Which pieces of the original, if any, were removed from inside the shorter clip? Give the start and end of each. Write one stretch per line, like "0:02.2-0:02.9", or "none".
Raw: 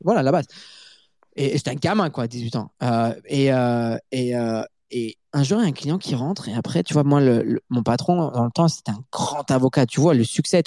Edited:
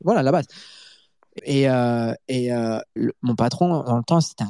0:01.4-0:03.2
0:04.8-0:07.4